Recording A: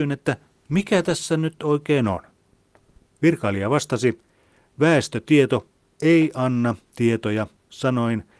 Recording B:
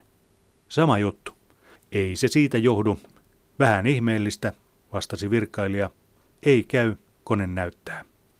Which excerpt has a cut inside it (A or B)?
B